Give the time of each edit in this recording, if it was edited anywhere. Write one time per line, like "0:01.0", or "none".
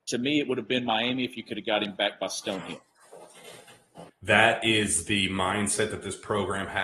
0:04.1